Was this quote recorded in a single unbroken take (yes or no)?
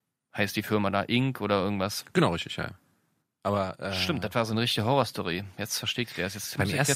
yes